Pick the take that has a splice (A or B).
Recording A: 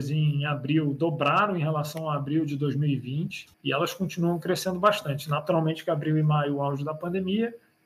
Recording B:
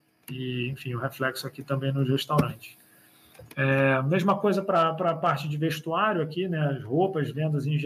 A